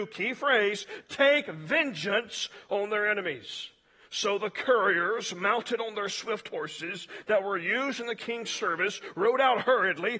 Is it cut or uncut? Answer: uncut